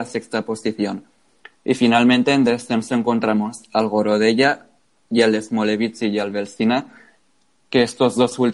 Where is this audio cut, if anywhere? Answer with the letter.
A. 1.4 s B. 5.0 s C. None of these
C